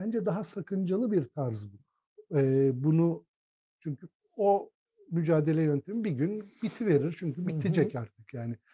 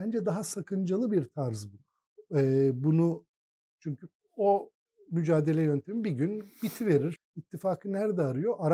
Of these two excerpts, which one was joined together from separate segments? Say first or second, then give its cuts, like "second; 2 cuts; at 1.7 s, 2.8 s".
second; 1 cut; at 7.2 s